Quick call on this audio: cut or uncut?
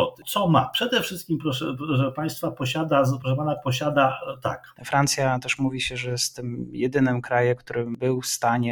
cut